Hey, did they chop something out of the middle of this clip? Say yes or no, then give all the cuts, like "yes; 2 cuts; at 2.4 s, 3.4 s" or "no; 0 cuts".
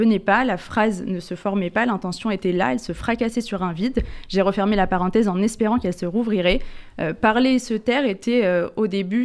no; 0 cuts